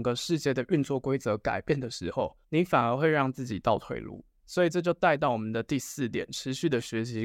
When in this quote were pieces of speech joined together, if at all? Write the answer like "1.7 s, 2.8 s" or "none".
none